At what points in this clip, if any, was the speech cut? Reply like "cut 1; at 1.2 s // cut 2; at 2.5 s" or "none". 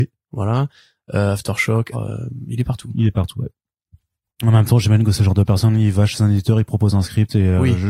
cut 1; at 1.9 s